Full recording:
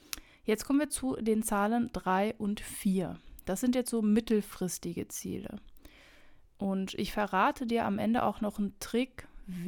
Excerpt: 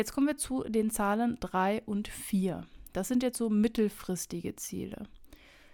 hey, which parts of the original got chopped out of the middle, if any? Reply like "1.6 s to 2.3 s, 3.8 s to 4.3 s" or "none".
none